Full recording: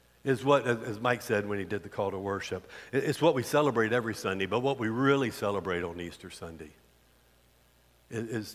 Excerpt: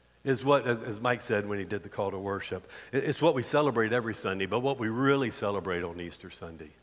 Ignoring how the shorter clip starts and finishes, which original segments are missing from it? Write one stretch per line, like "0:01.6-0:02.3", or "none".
none